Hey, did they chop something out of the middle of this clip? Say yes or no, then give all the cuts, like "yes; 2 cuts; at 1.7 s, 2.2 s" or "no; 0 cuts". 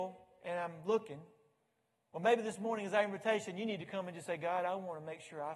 no; 0 cuts